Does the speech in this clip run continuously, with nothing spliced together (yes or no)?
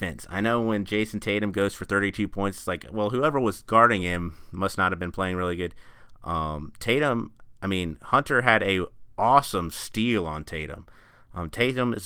yes